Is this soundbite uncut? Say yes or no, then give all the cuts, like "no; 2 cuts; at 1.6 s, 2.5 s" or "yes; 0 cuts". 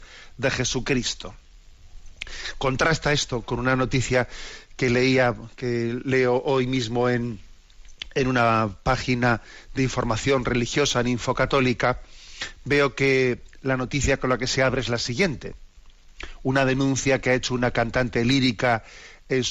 yes; 0 cuts